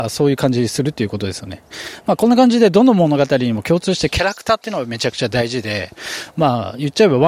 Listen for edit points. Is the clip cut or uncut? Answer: uncut